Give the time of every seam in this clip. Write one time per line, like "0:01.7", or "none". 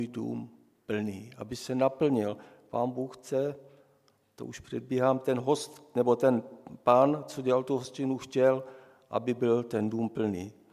none